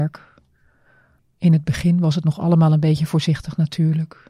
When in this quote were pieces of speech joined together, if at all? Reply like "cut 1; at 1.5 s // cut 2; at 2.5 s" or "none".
cut 1; at 1.2 s